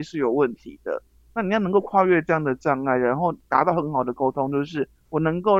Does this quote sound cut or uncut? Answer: uncut